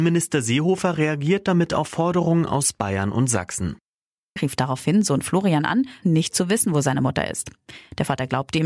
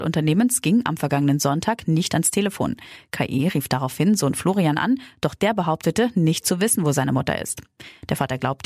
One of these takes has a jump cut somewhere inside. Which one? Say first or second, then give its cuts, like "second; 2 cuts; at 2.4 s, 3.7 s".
first; 2 cuts; at 4.4 s, 6.0 s